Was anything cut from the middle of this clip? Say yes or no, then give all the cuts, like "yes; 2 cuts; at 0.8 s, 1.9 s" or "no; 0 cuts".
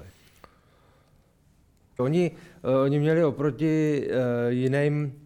yes; 1 cut; at 2.0 s